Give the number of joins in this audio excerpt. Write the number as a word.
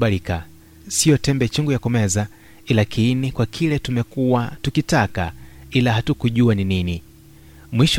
zero